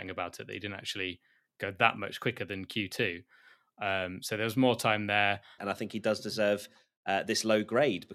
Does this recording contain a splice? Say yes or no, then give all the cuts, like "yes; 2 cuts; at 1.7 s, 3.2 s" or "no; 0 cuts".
yes; 1 cut; at 5.6 s